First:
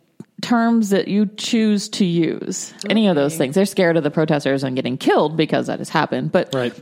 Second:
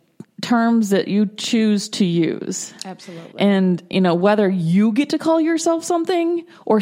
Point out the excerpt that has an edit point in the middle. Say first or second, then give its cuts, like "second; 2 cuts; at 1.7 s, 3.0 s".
first; 1 cut; at 2.8 s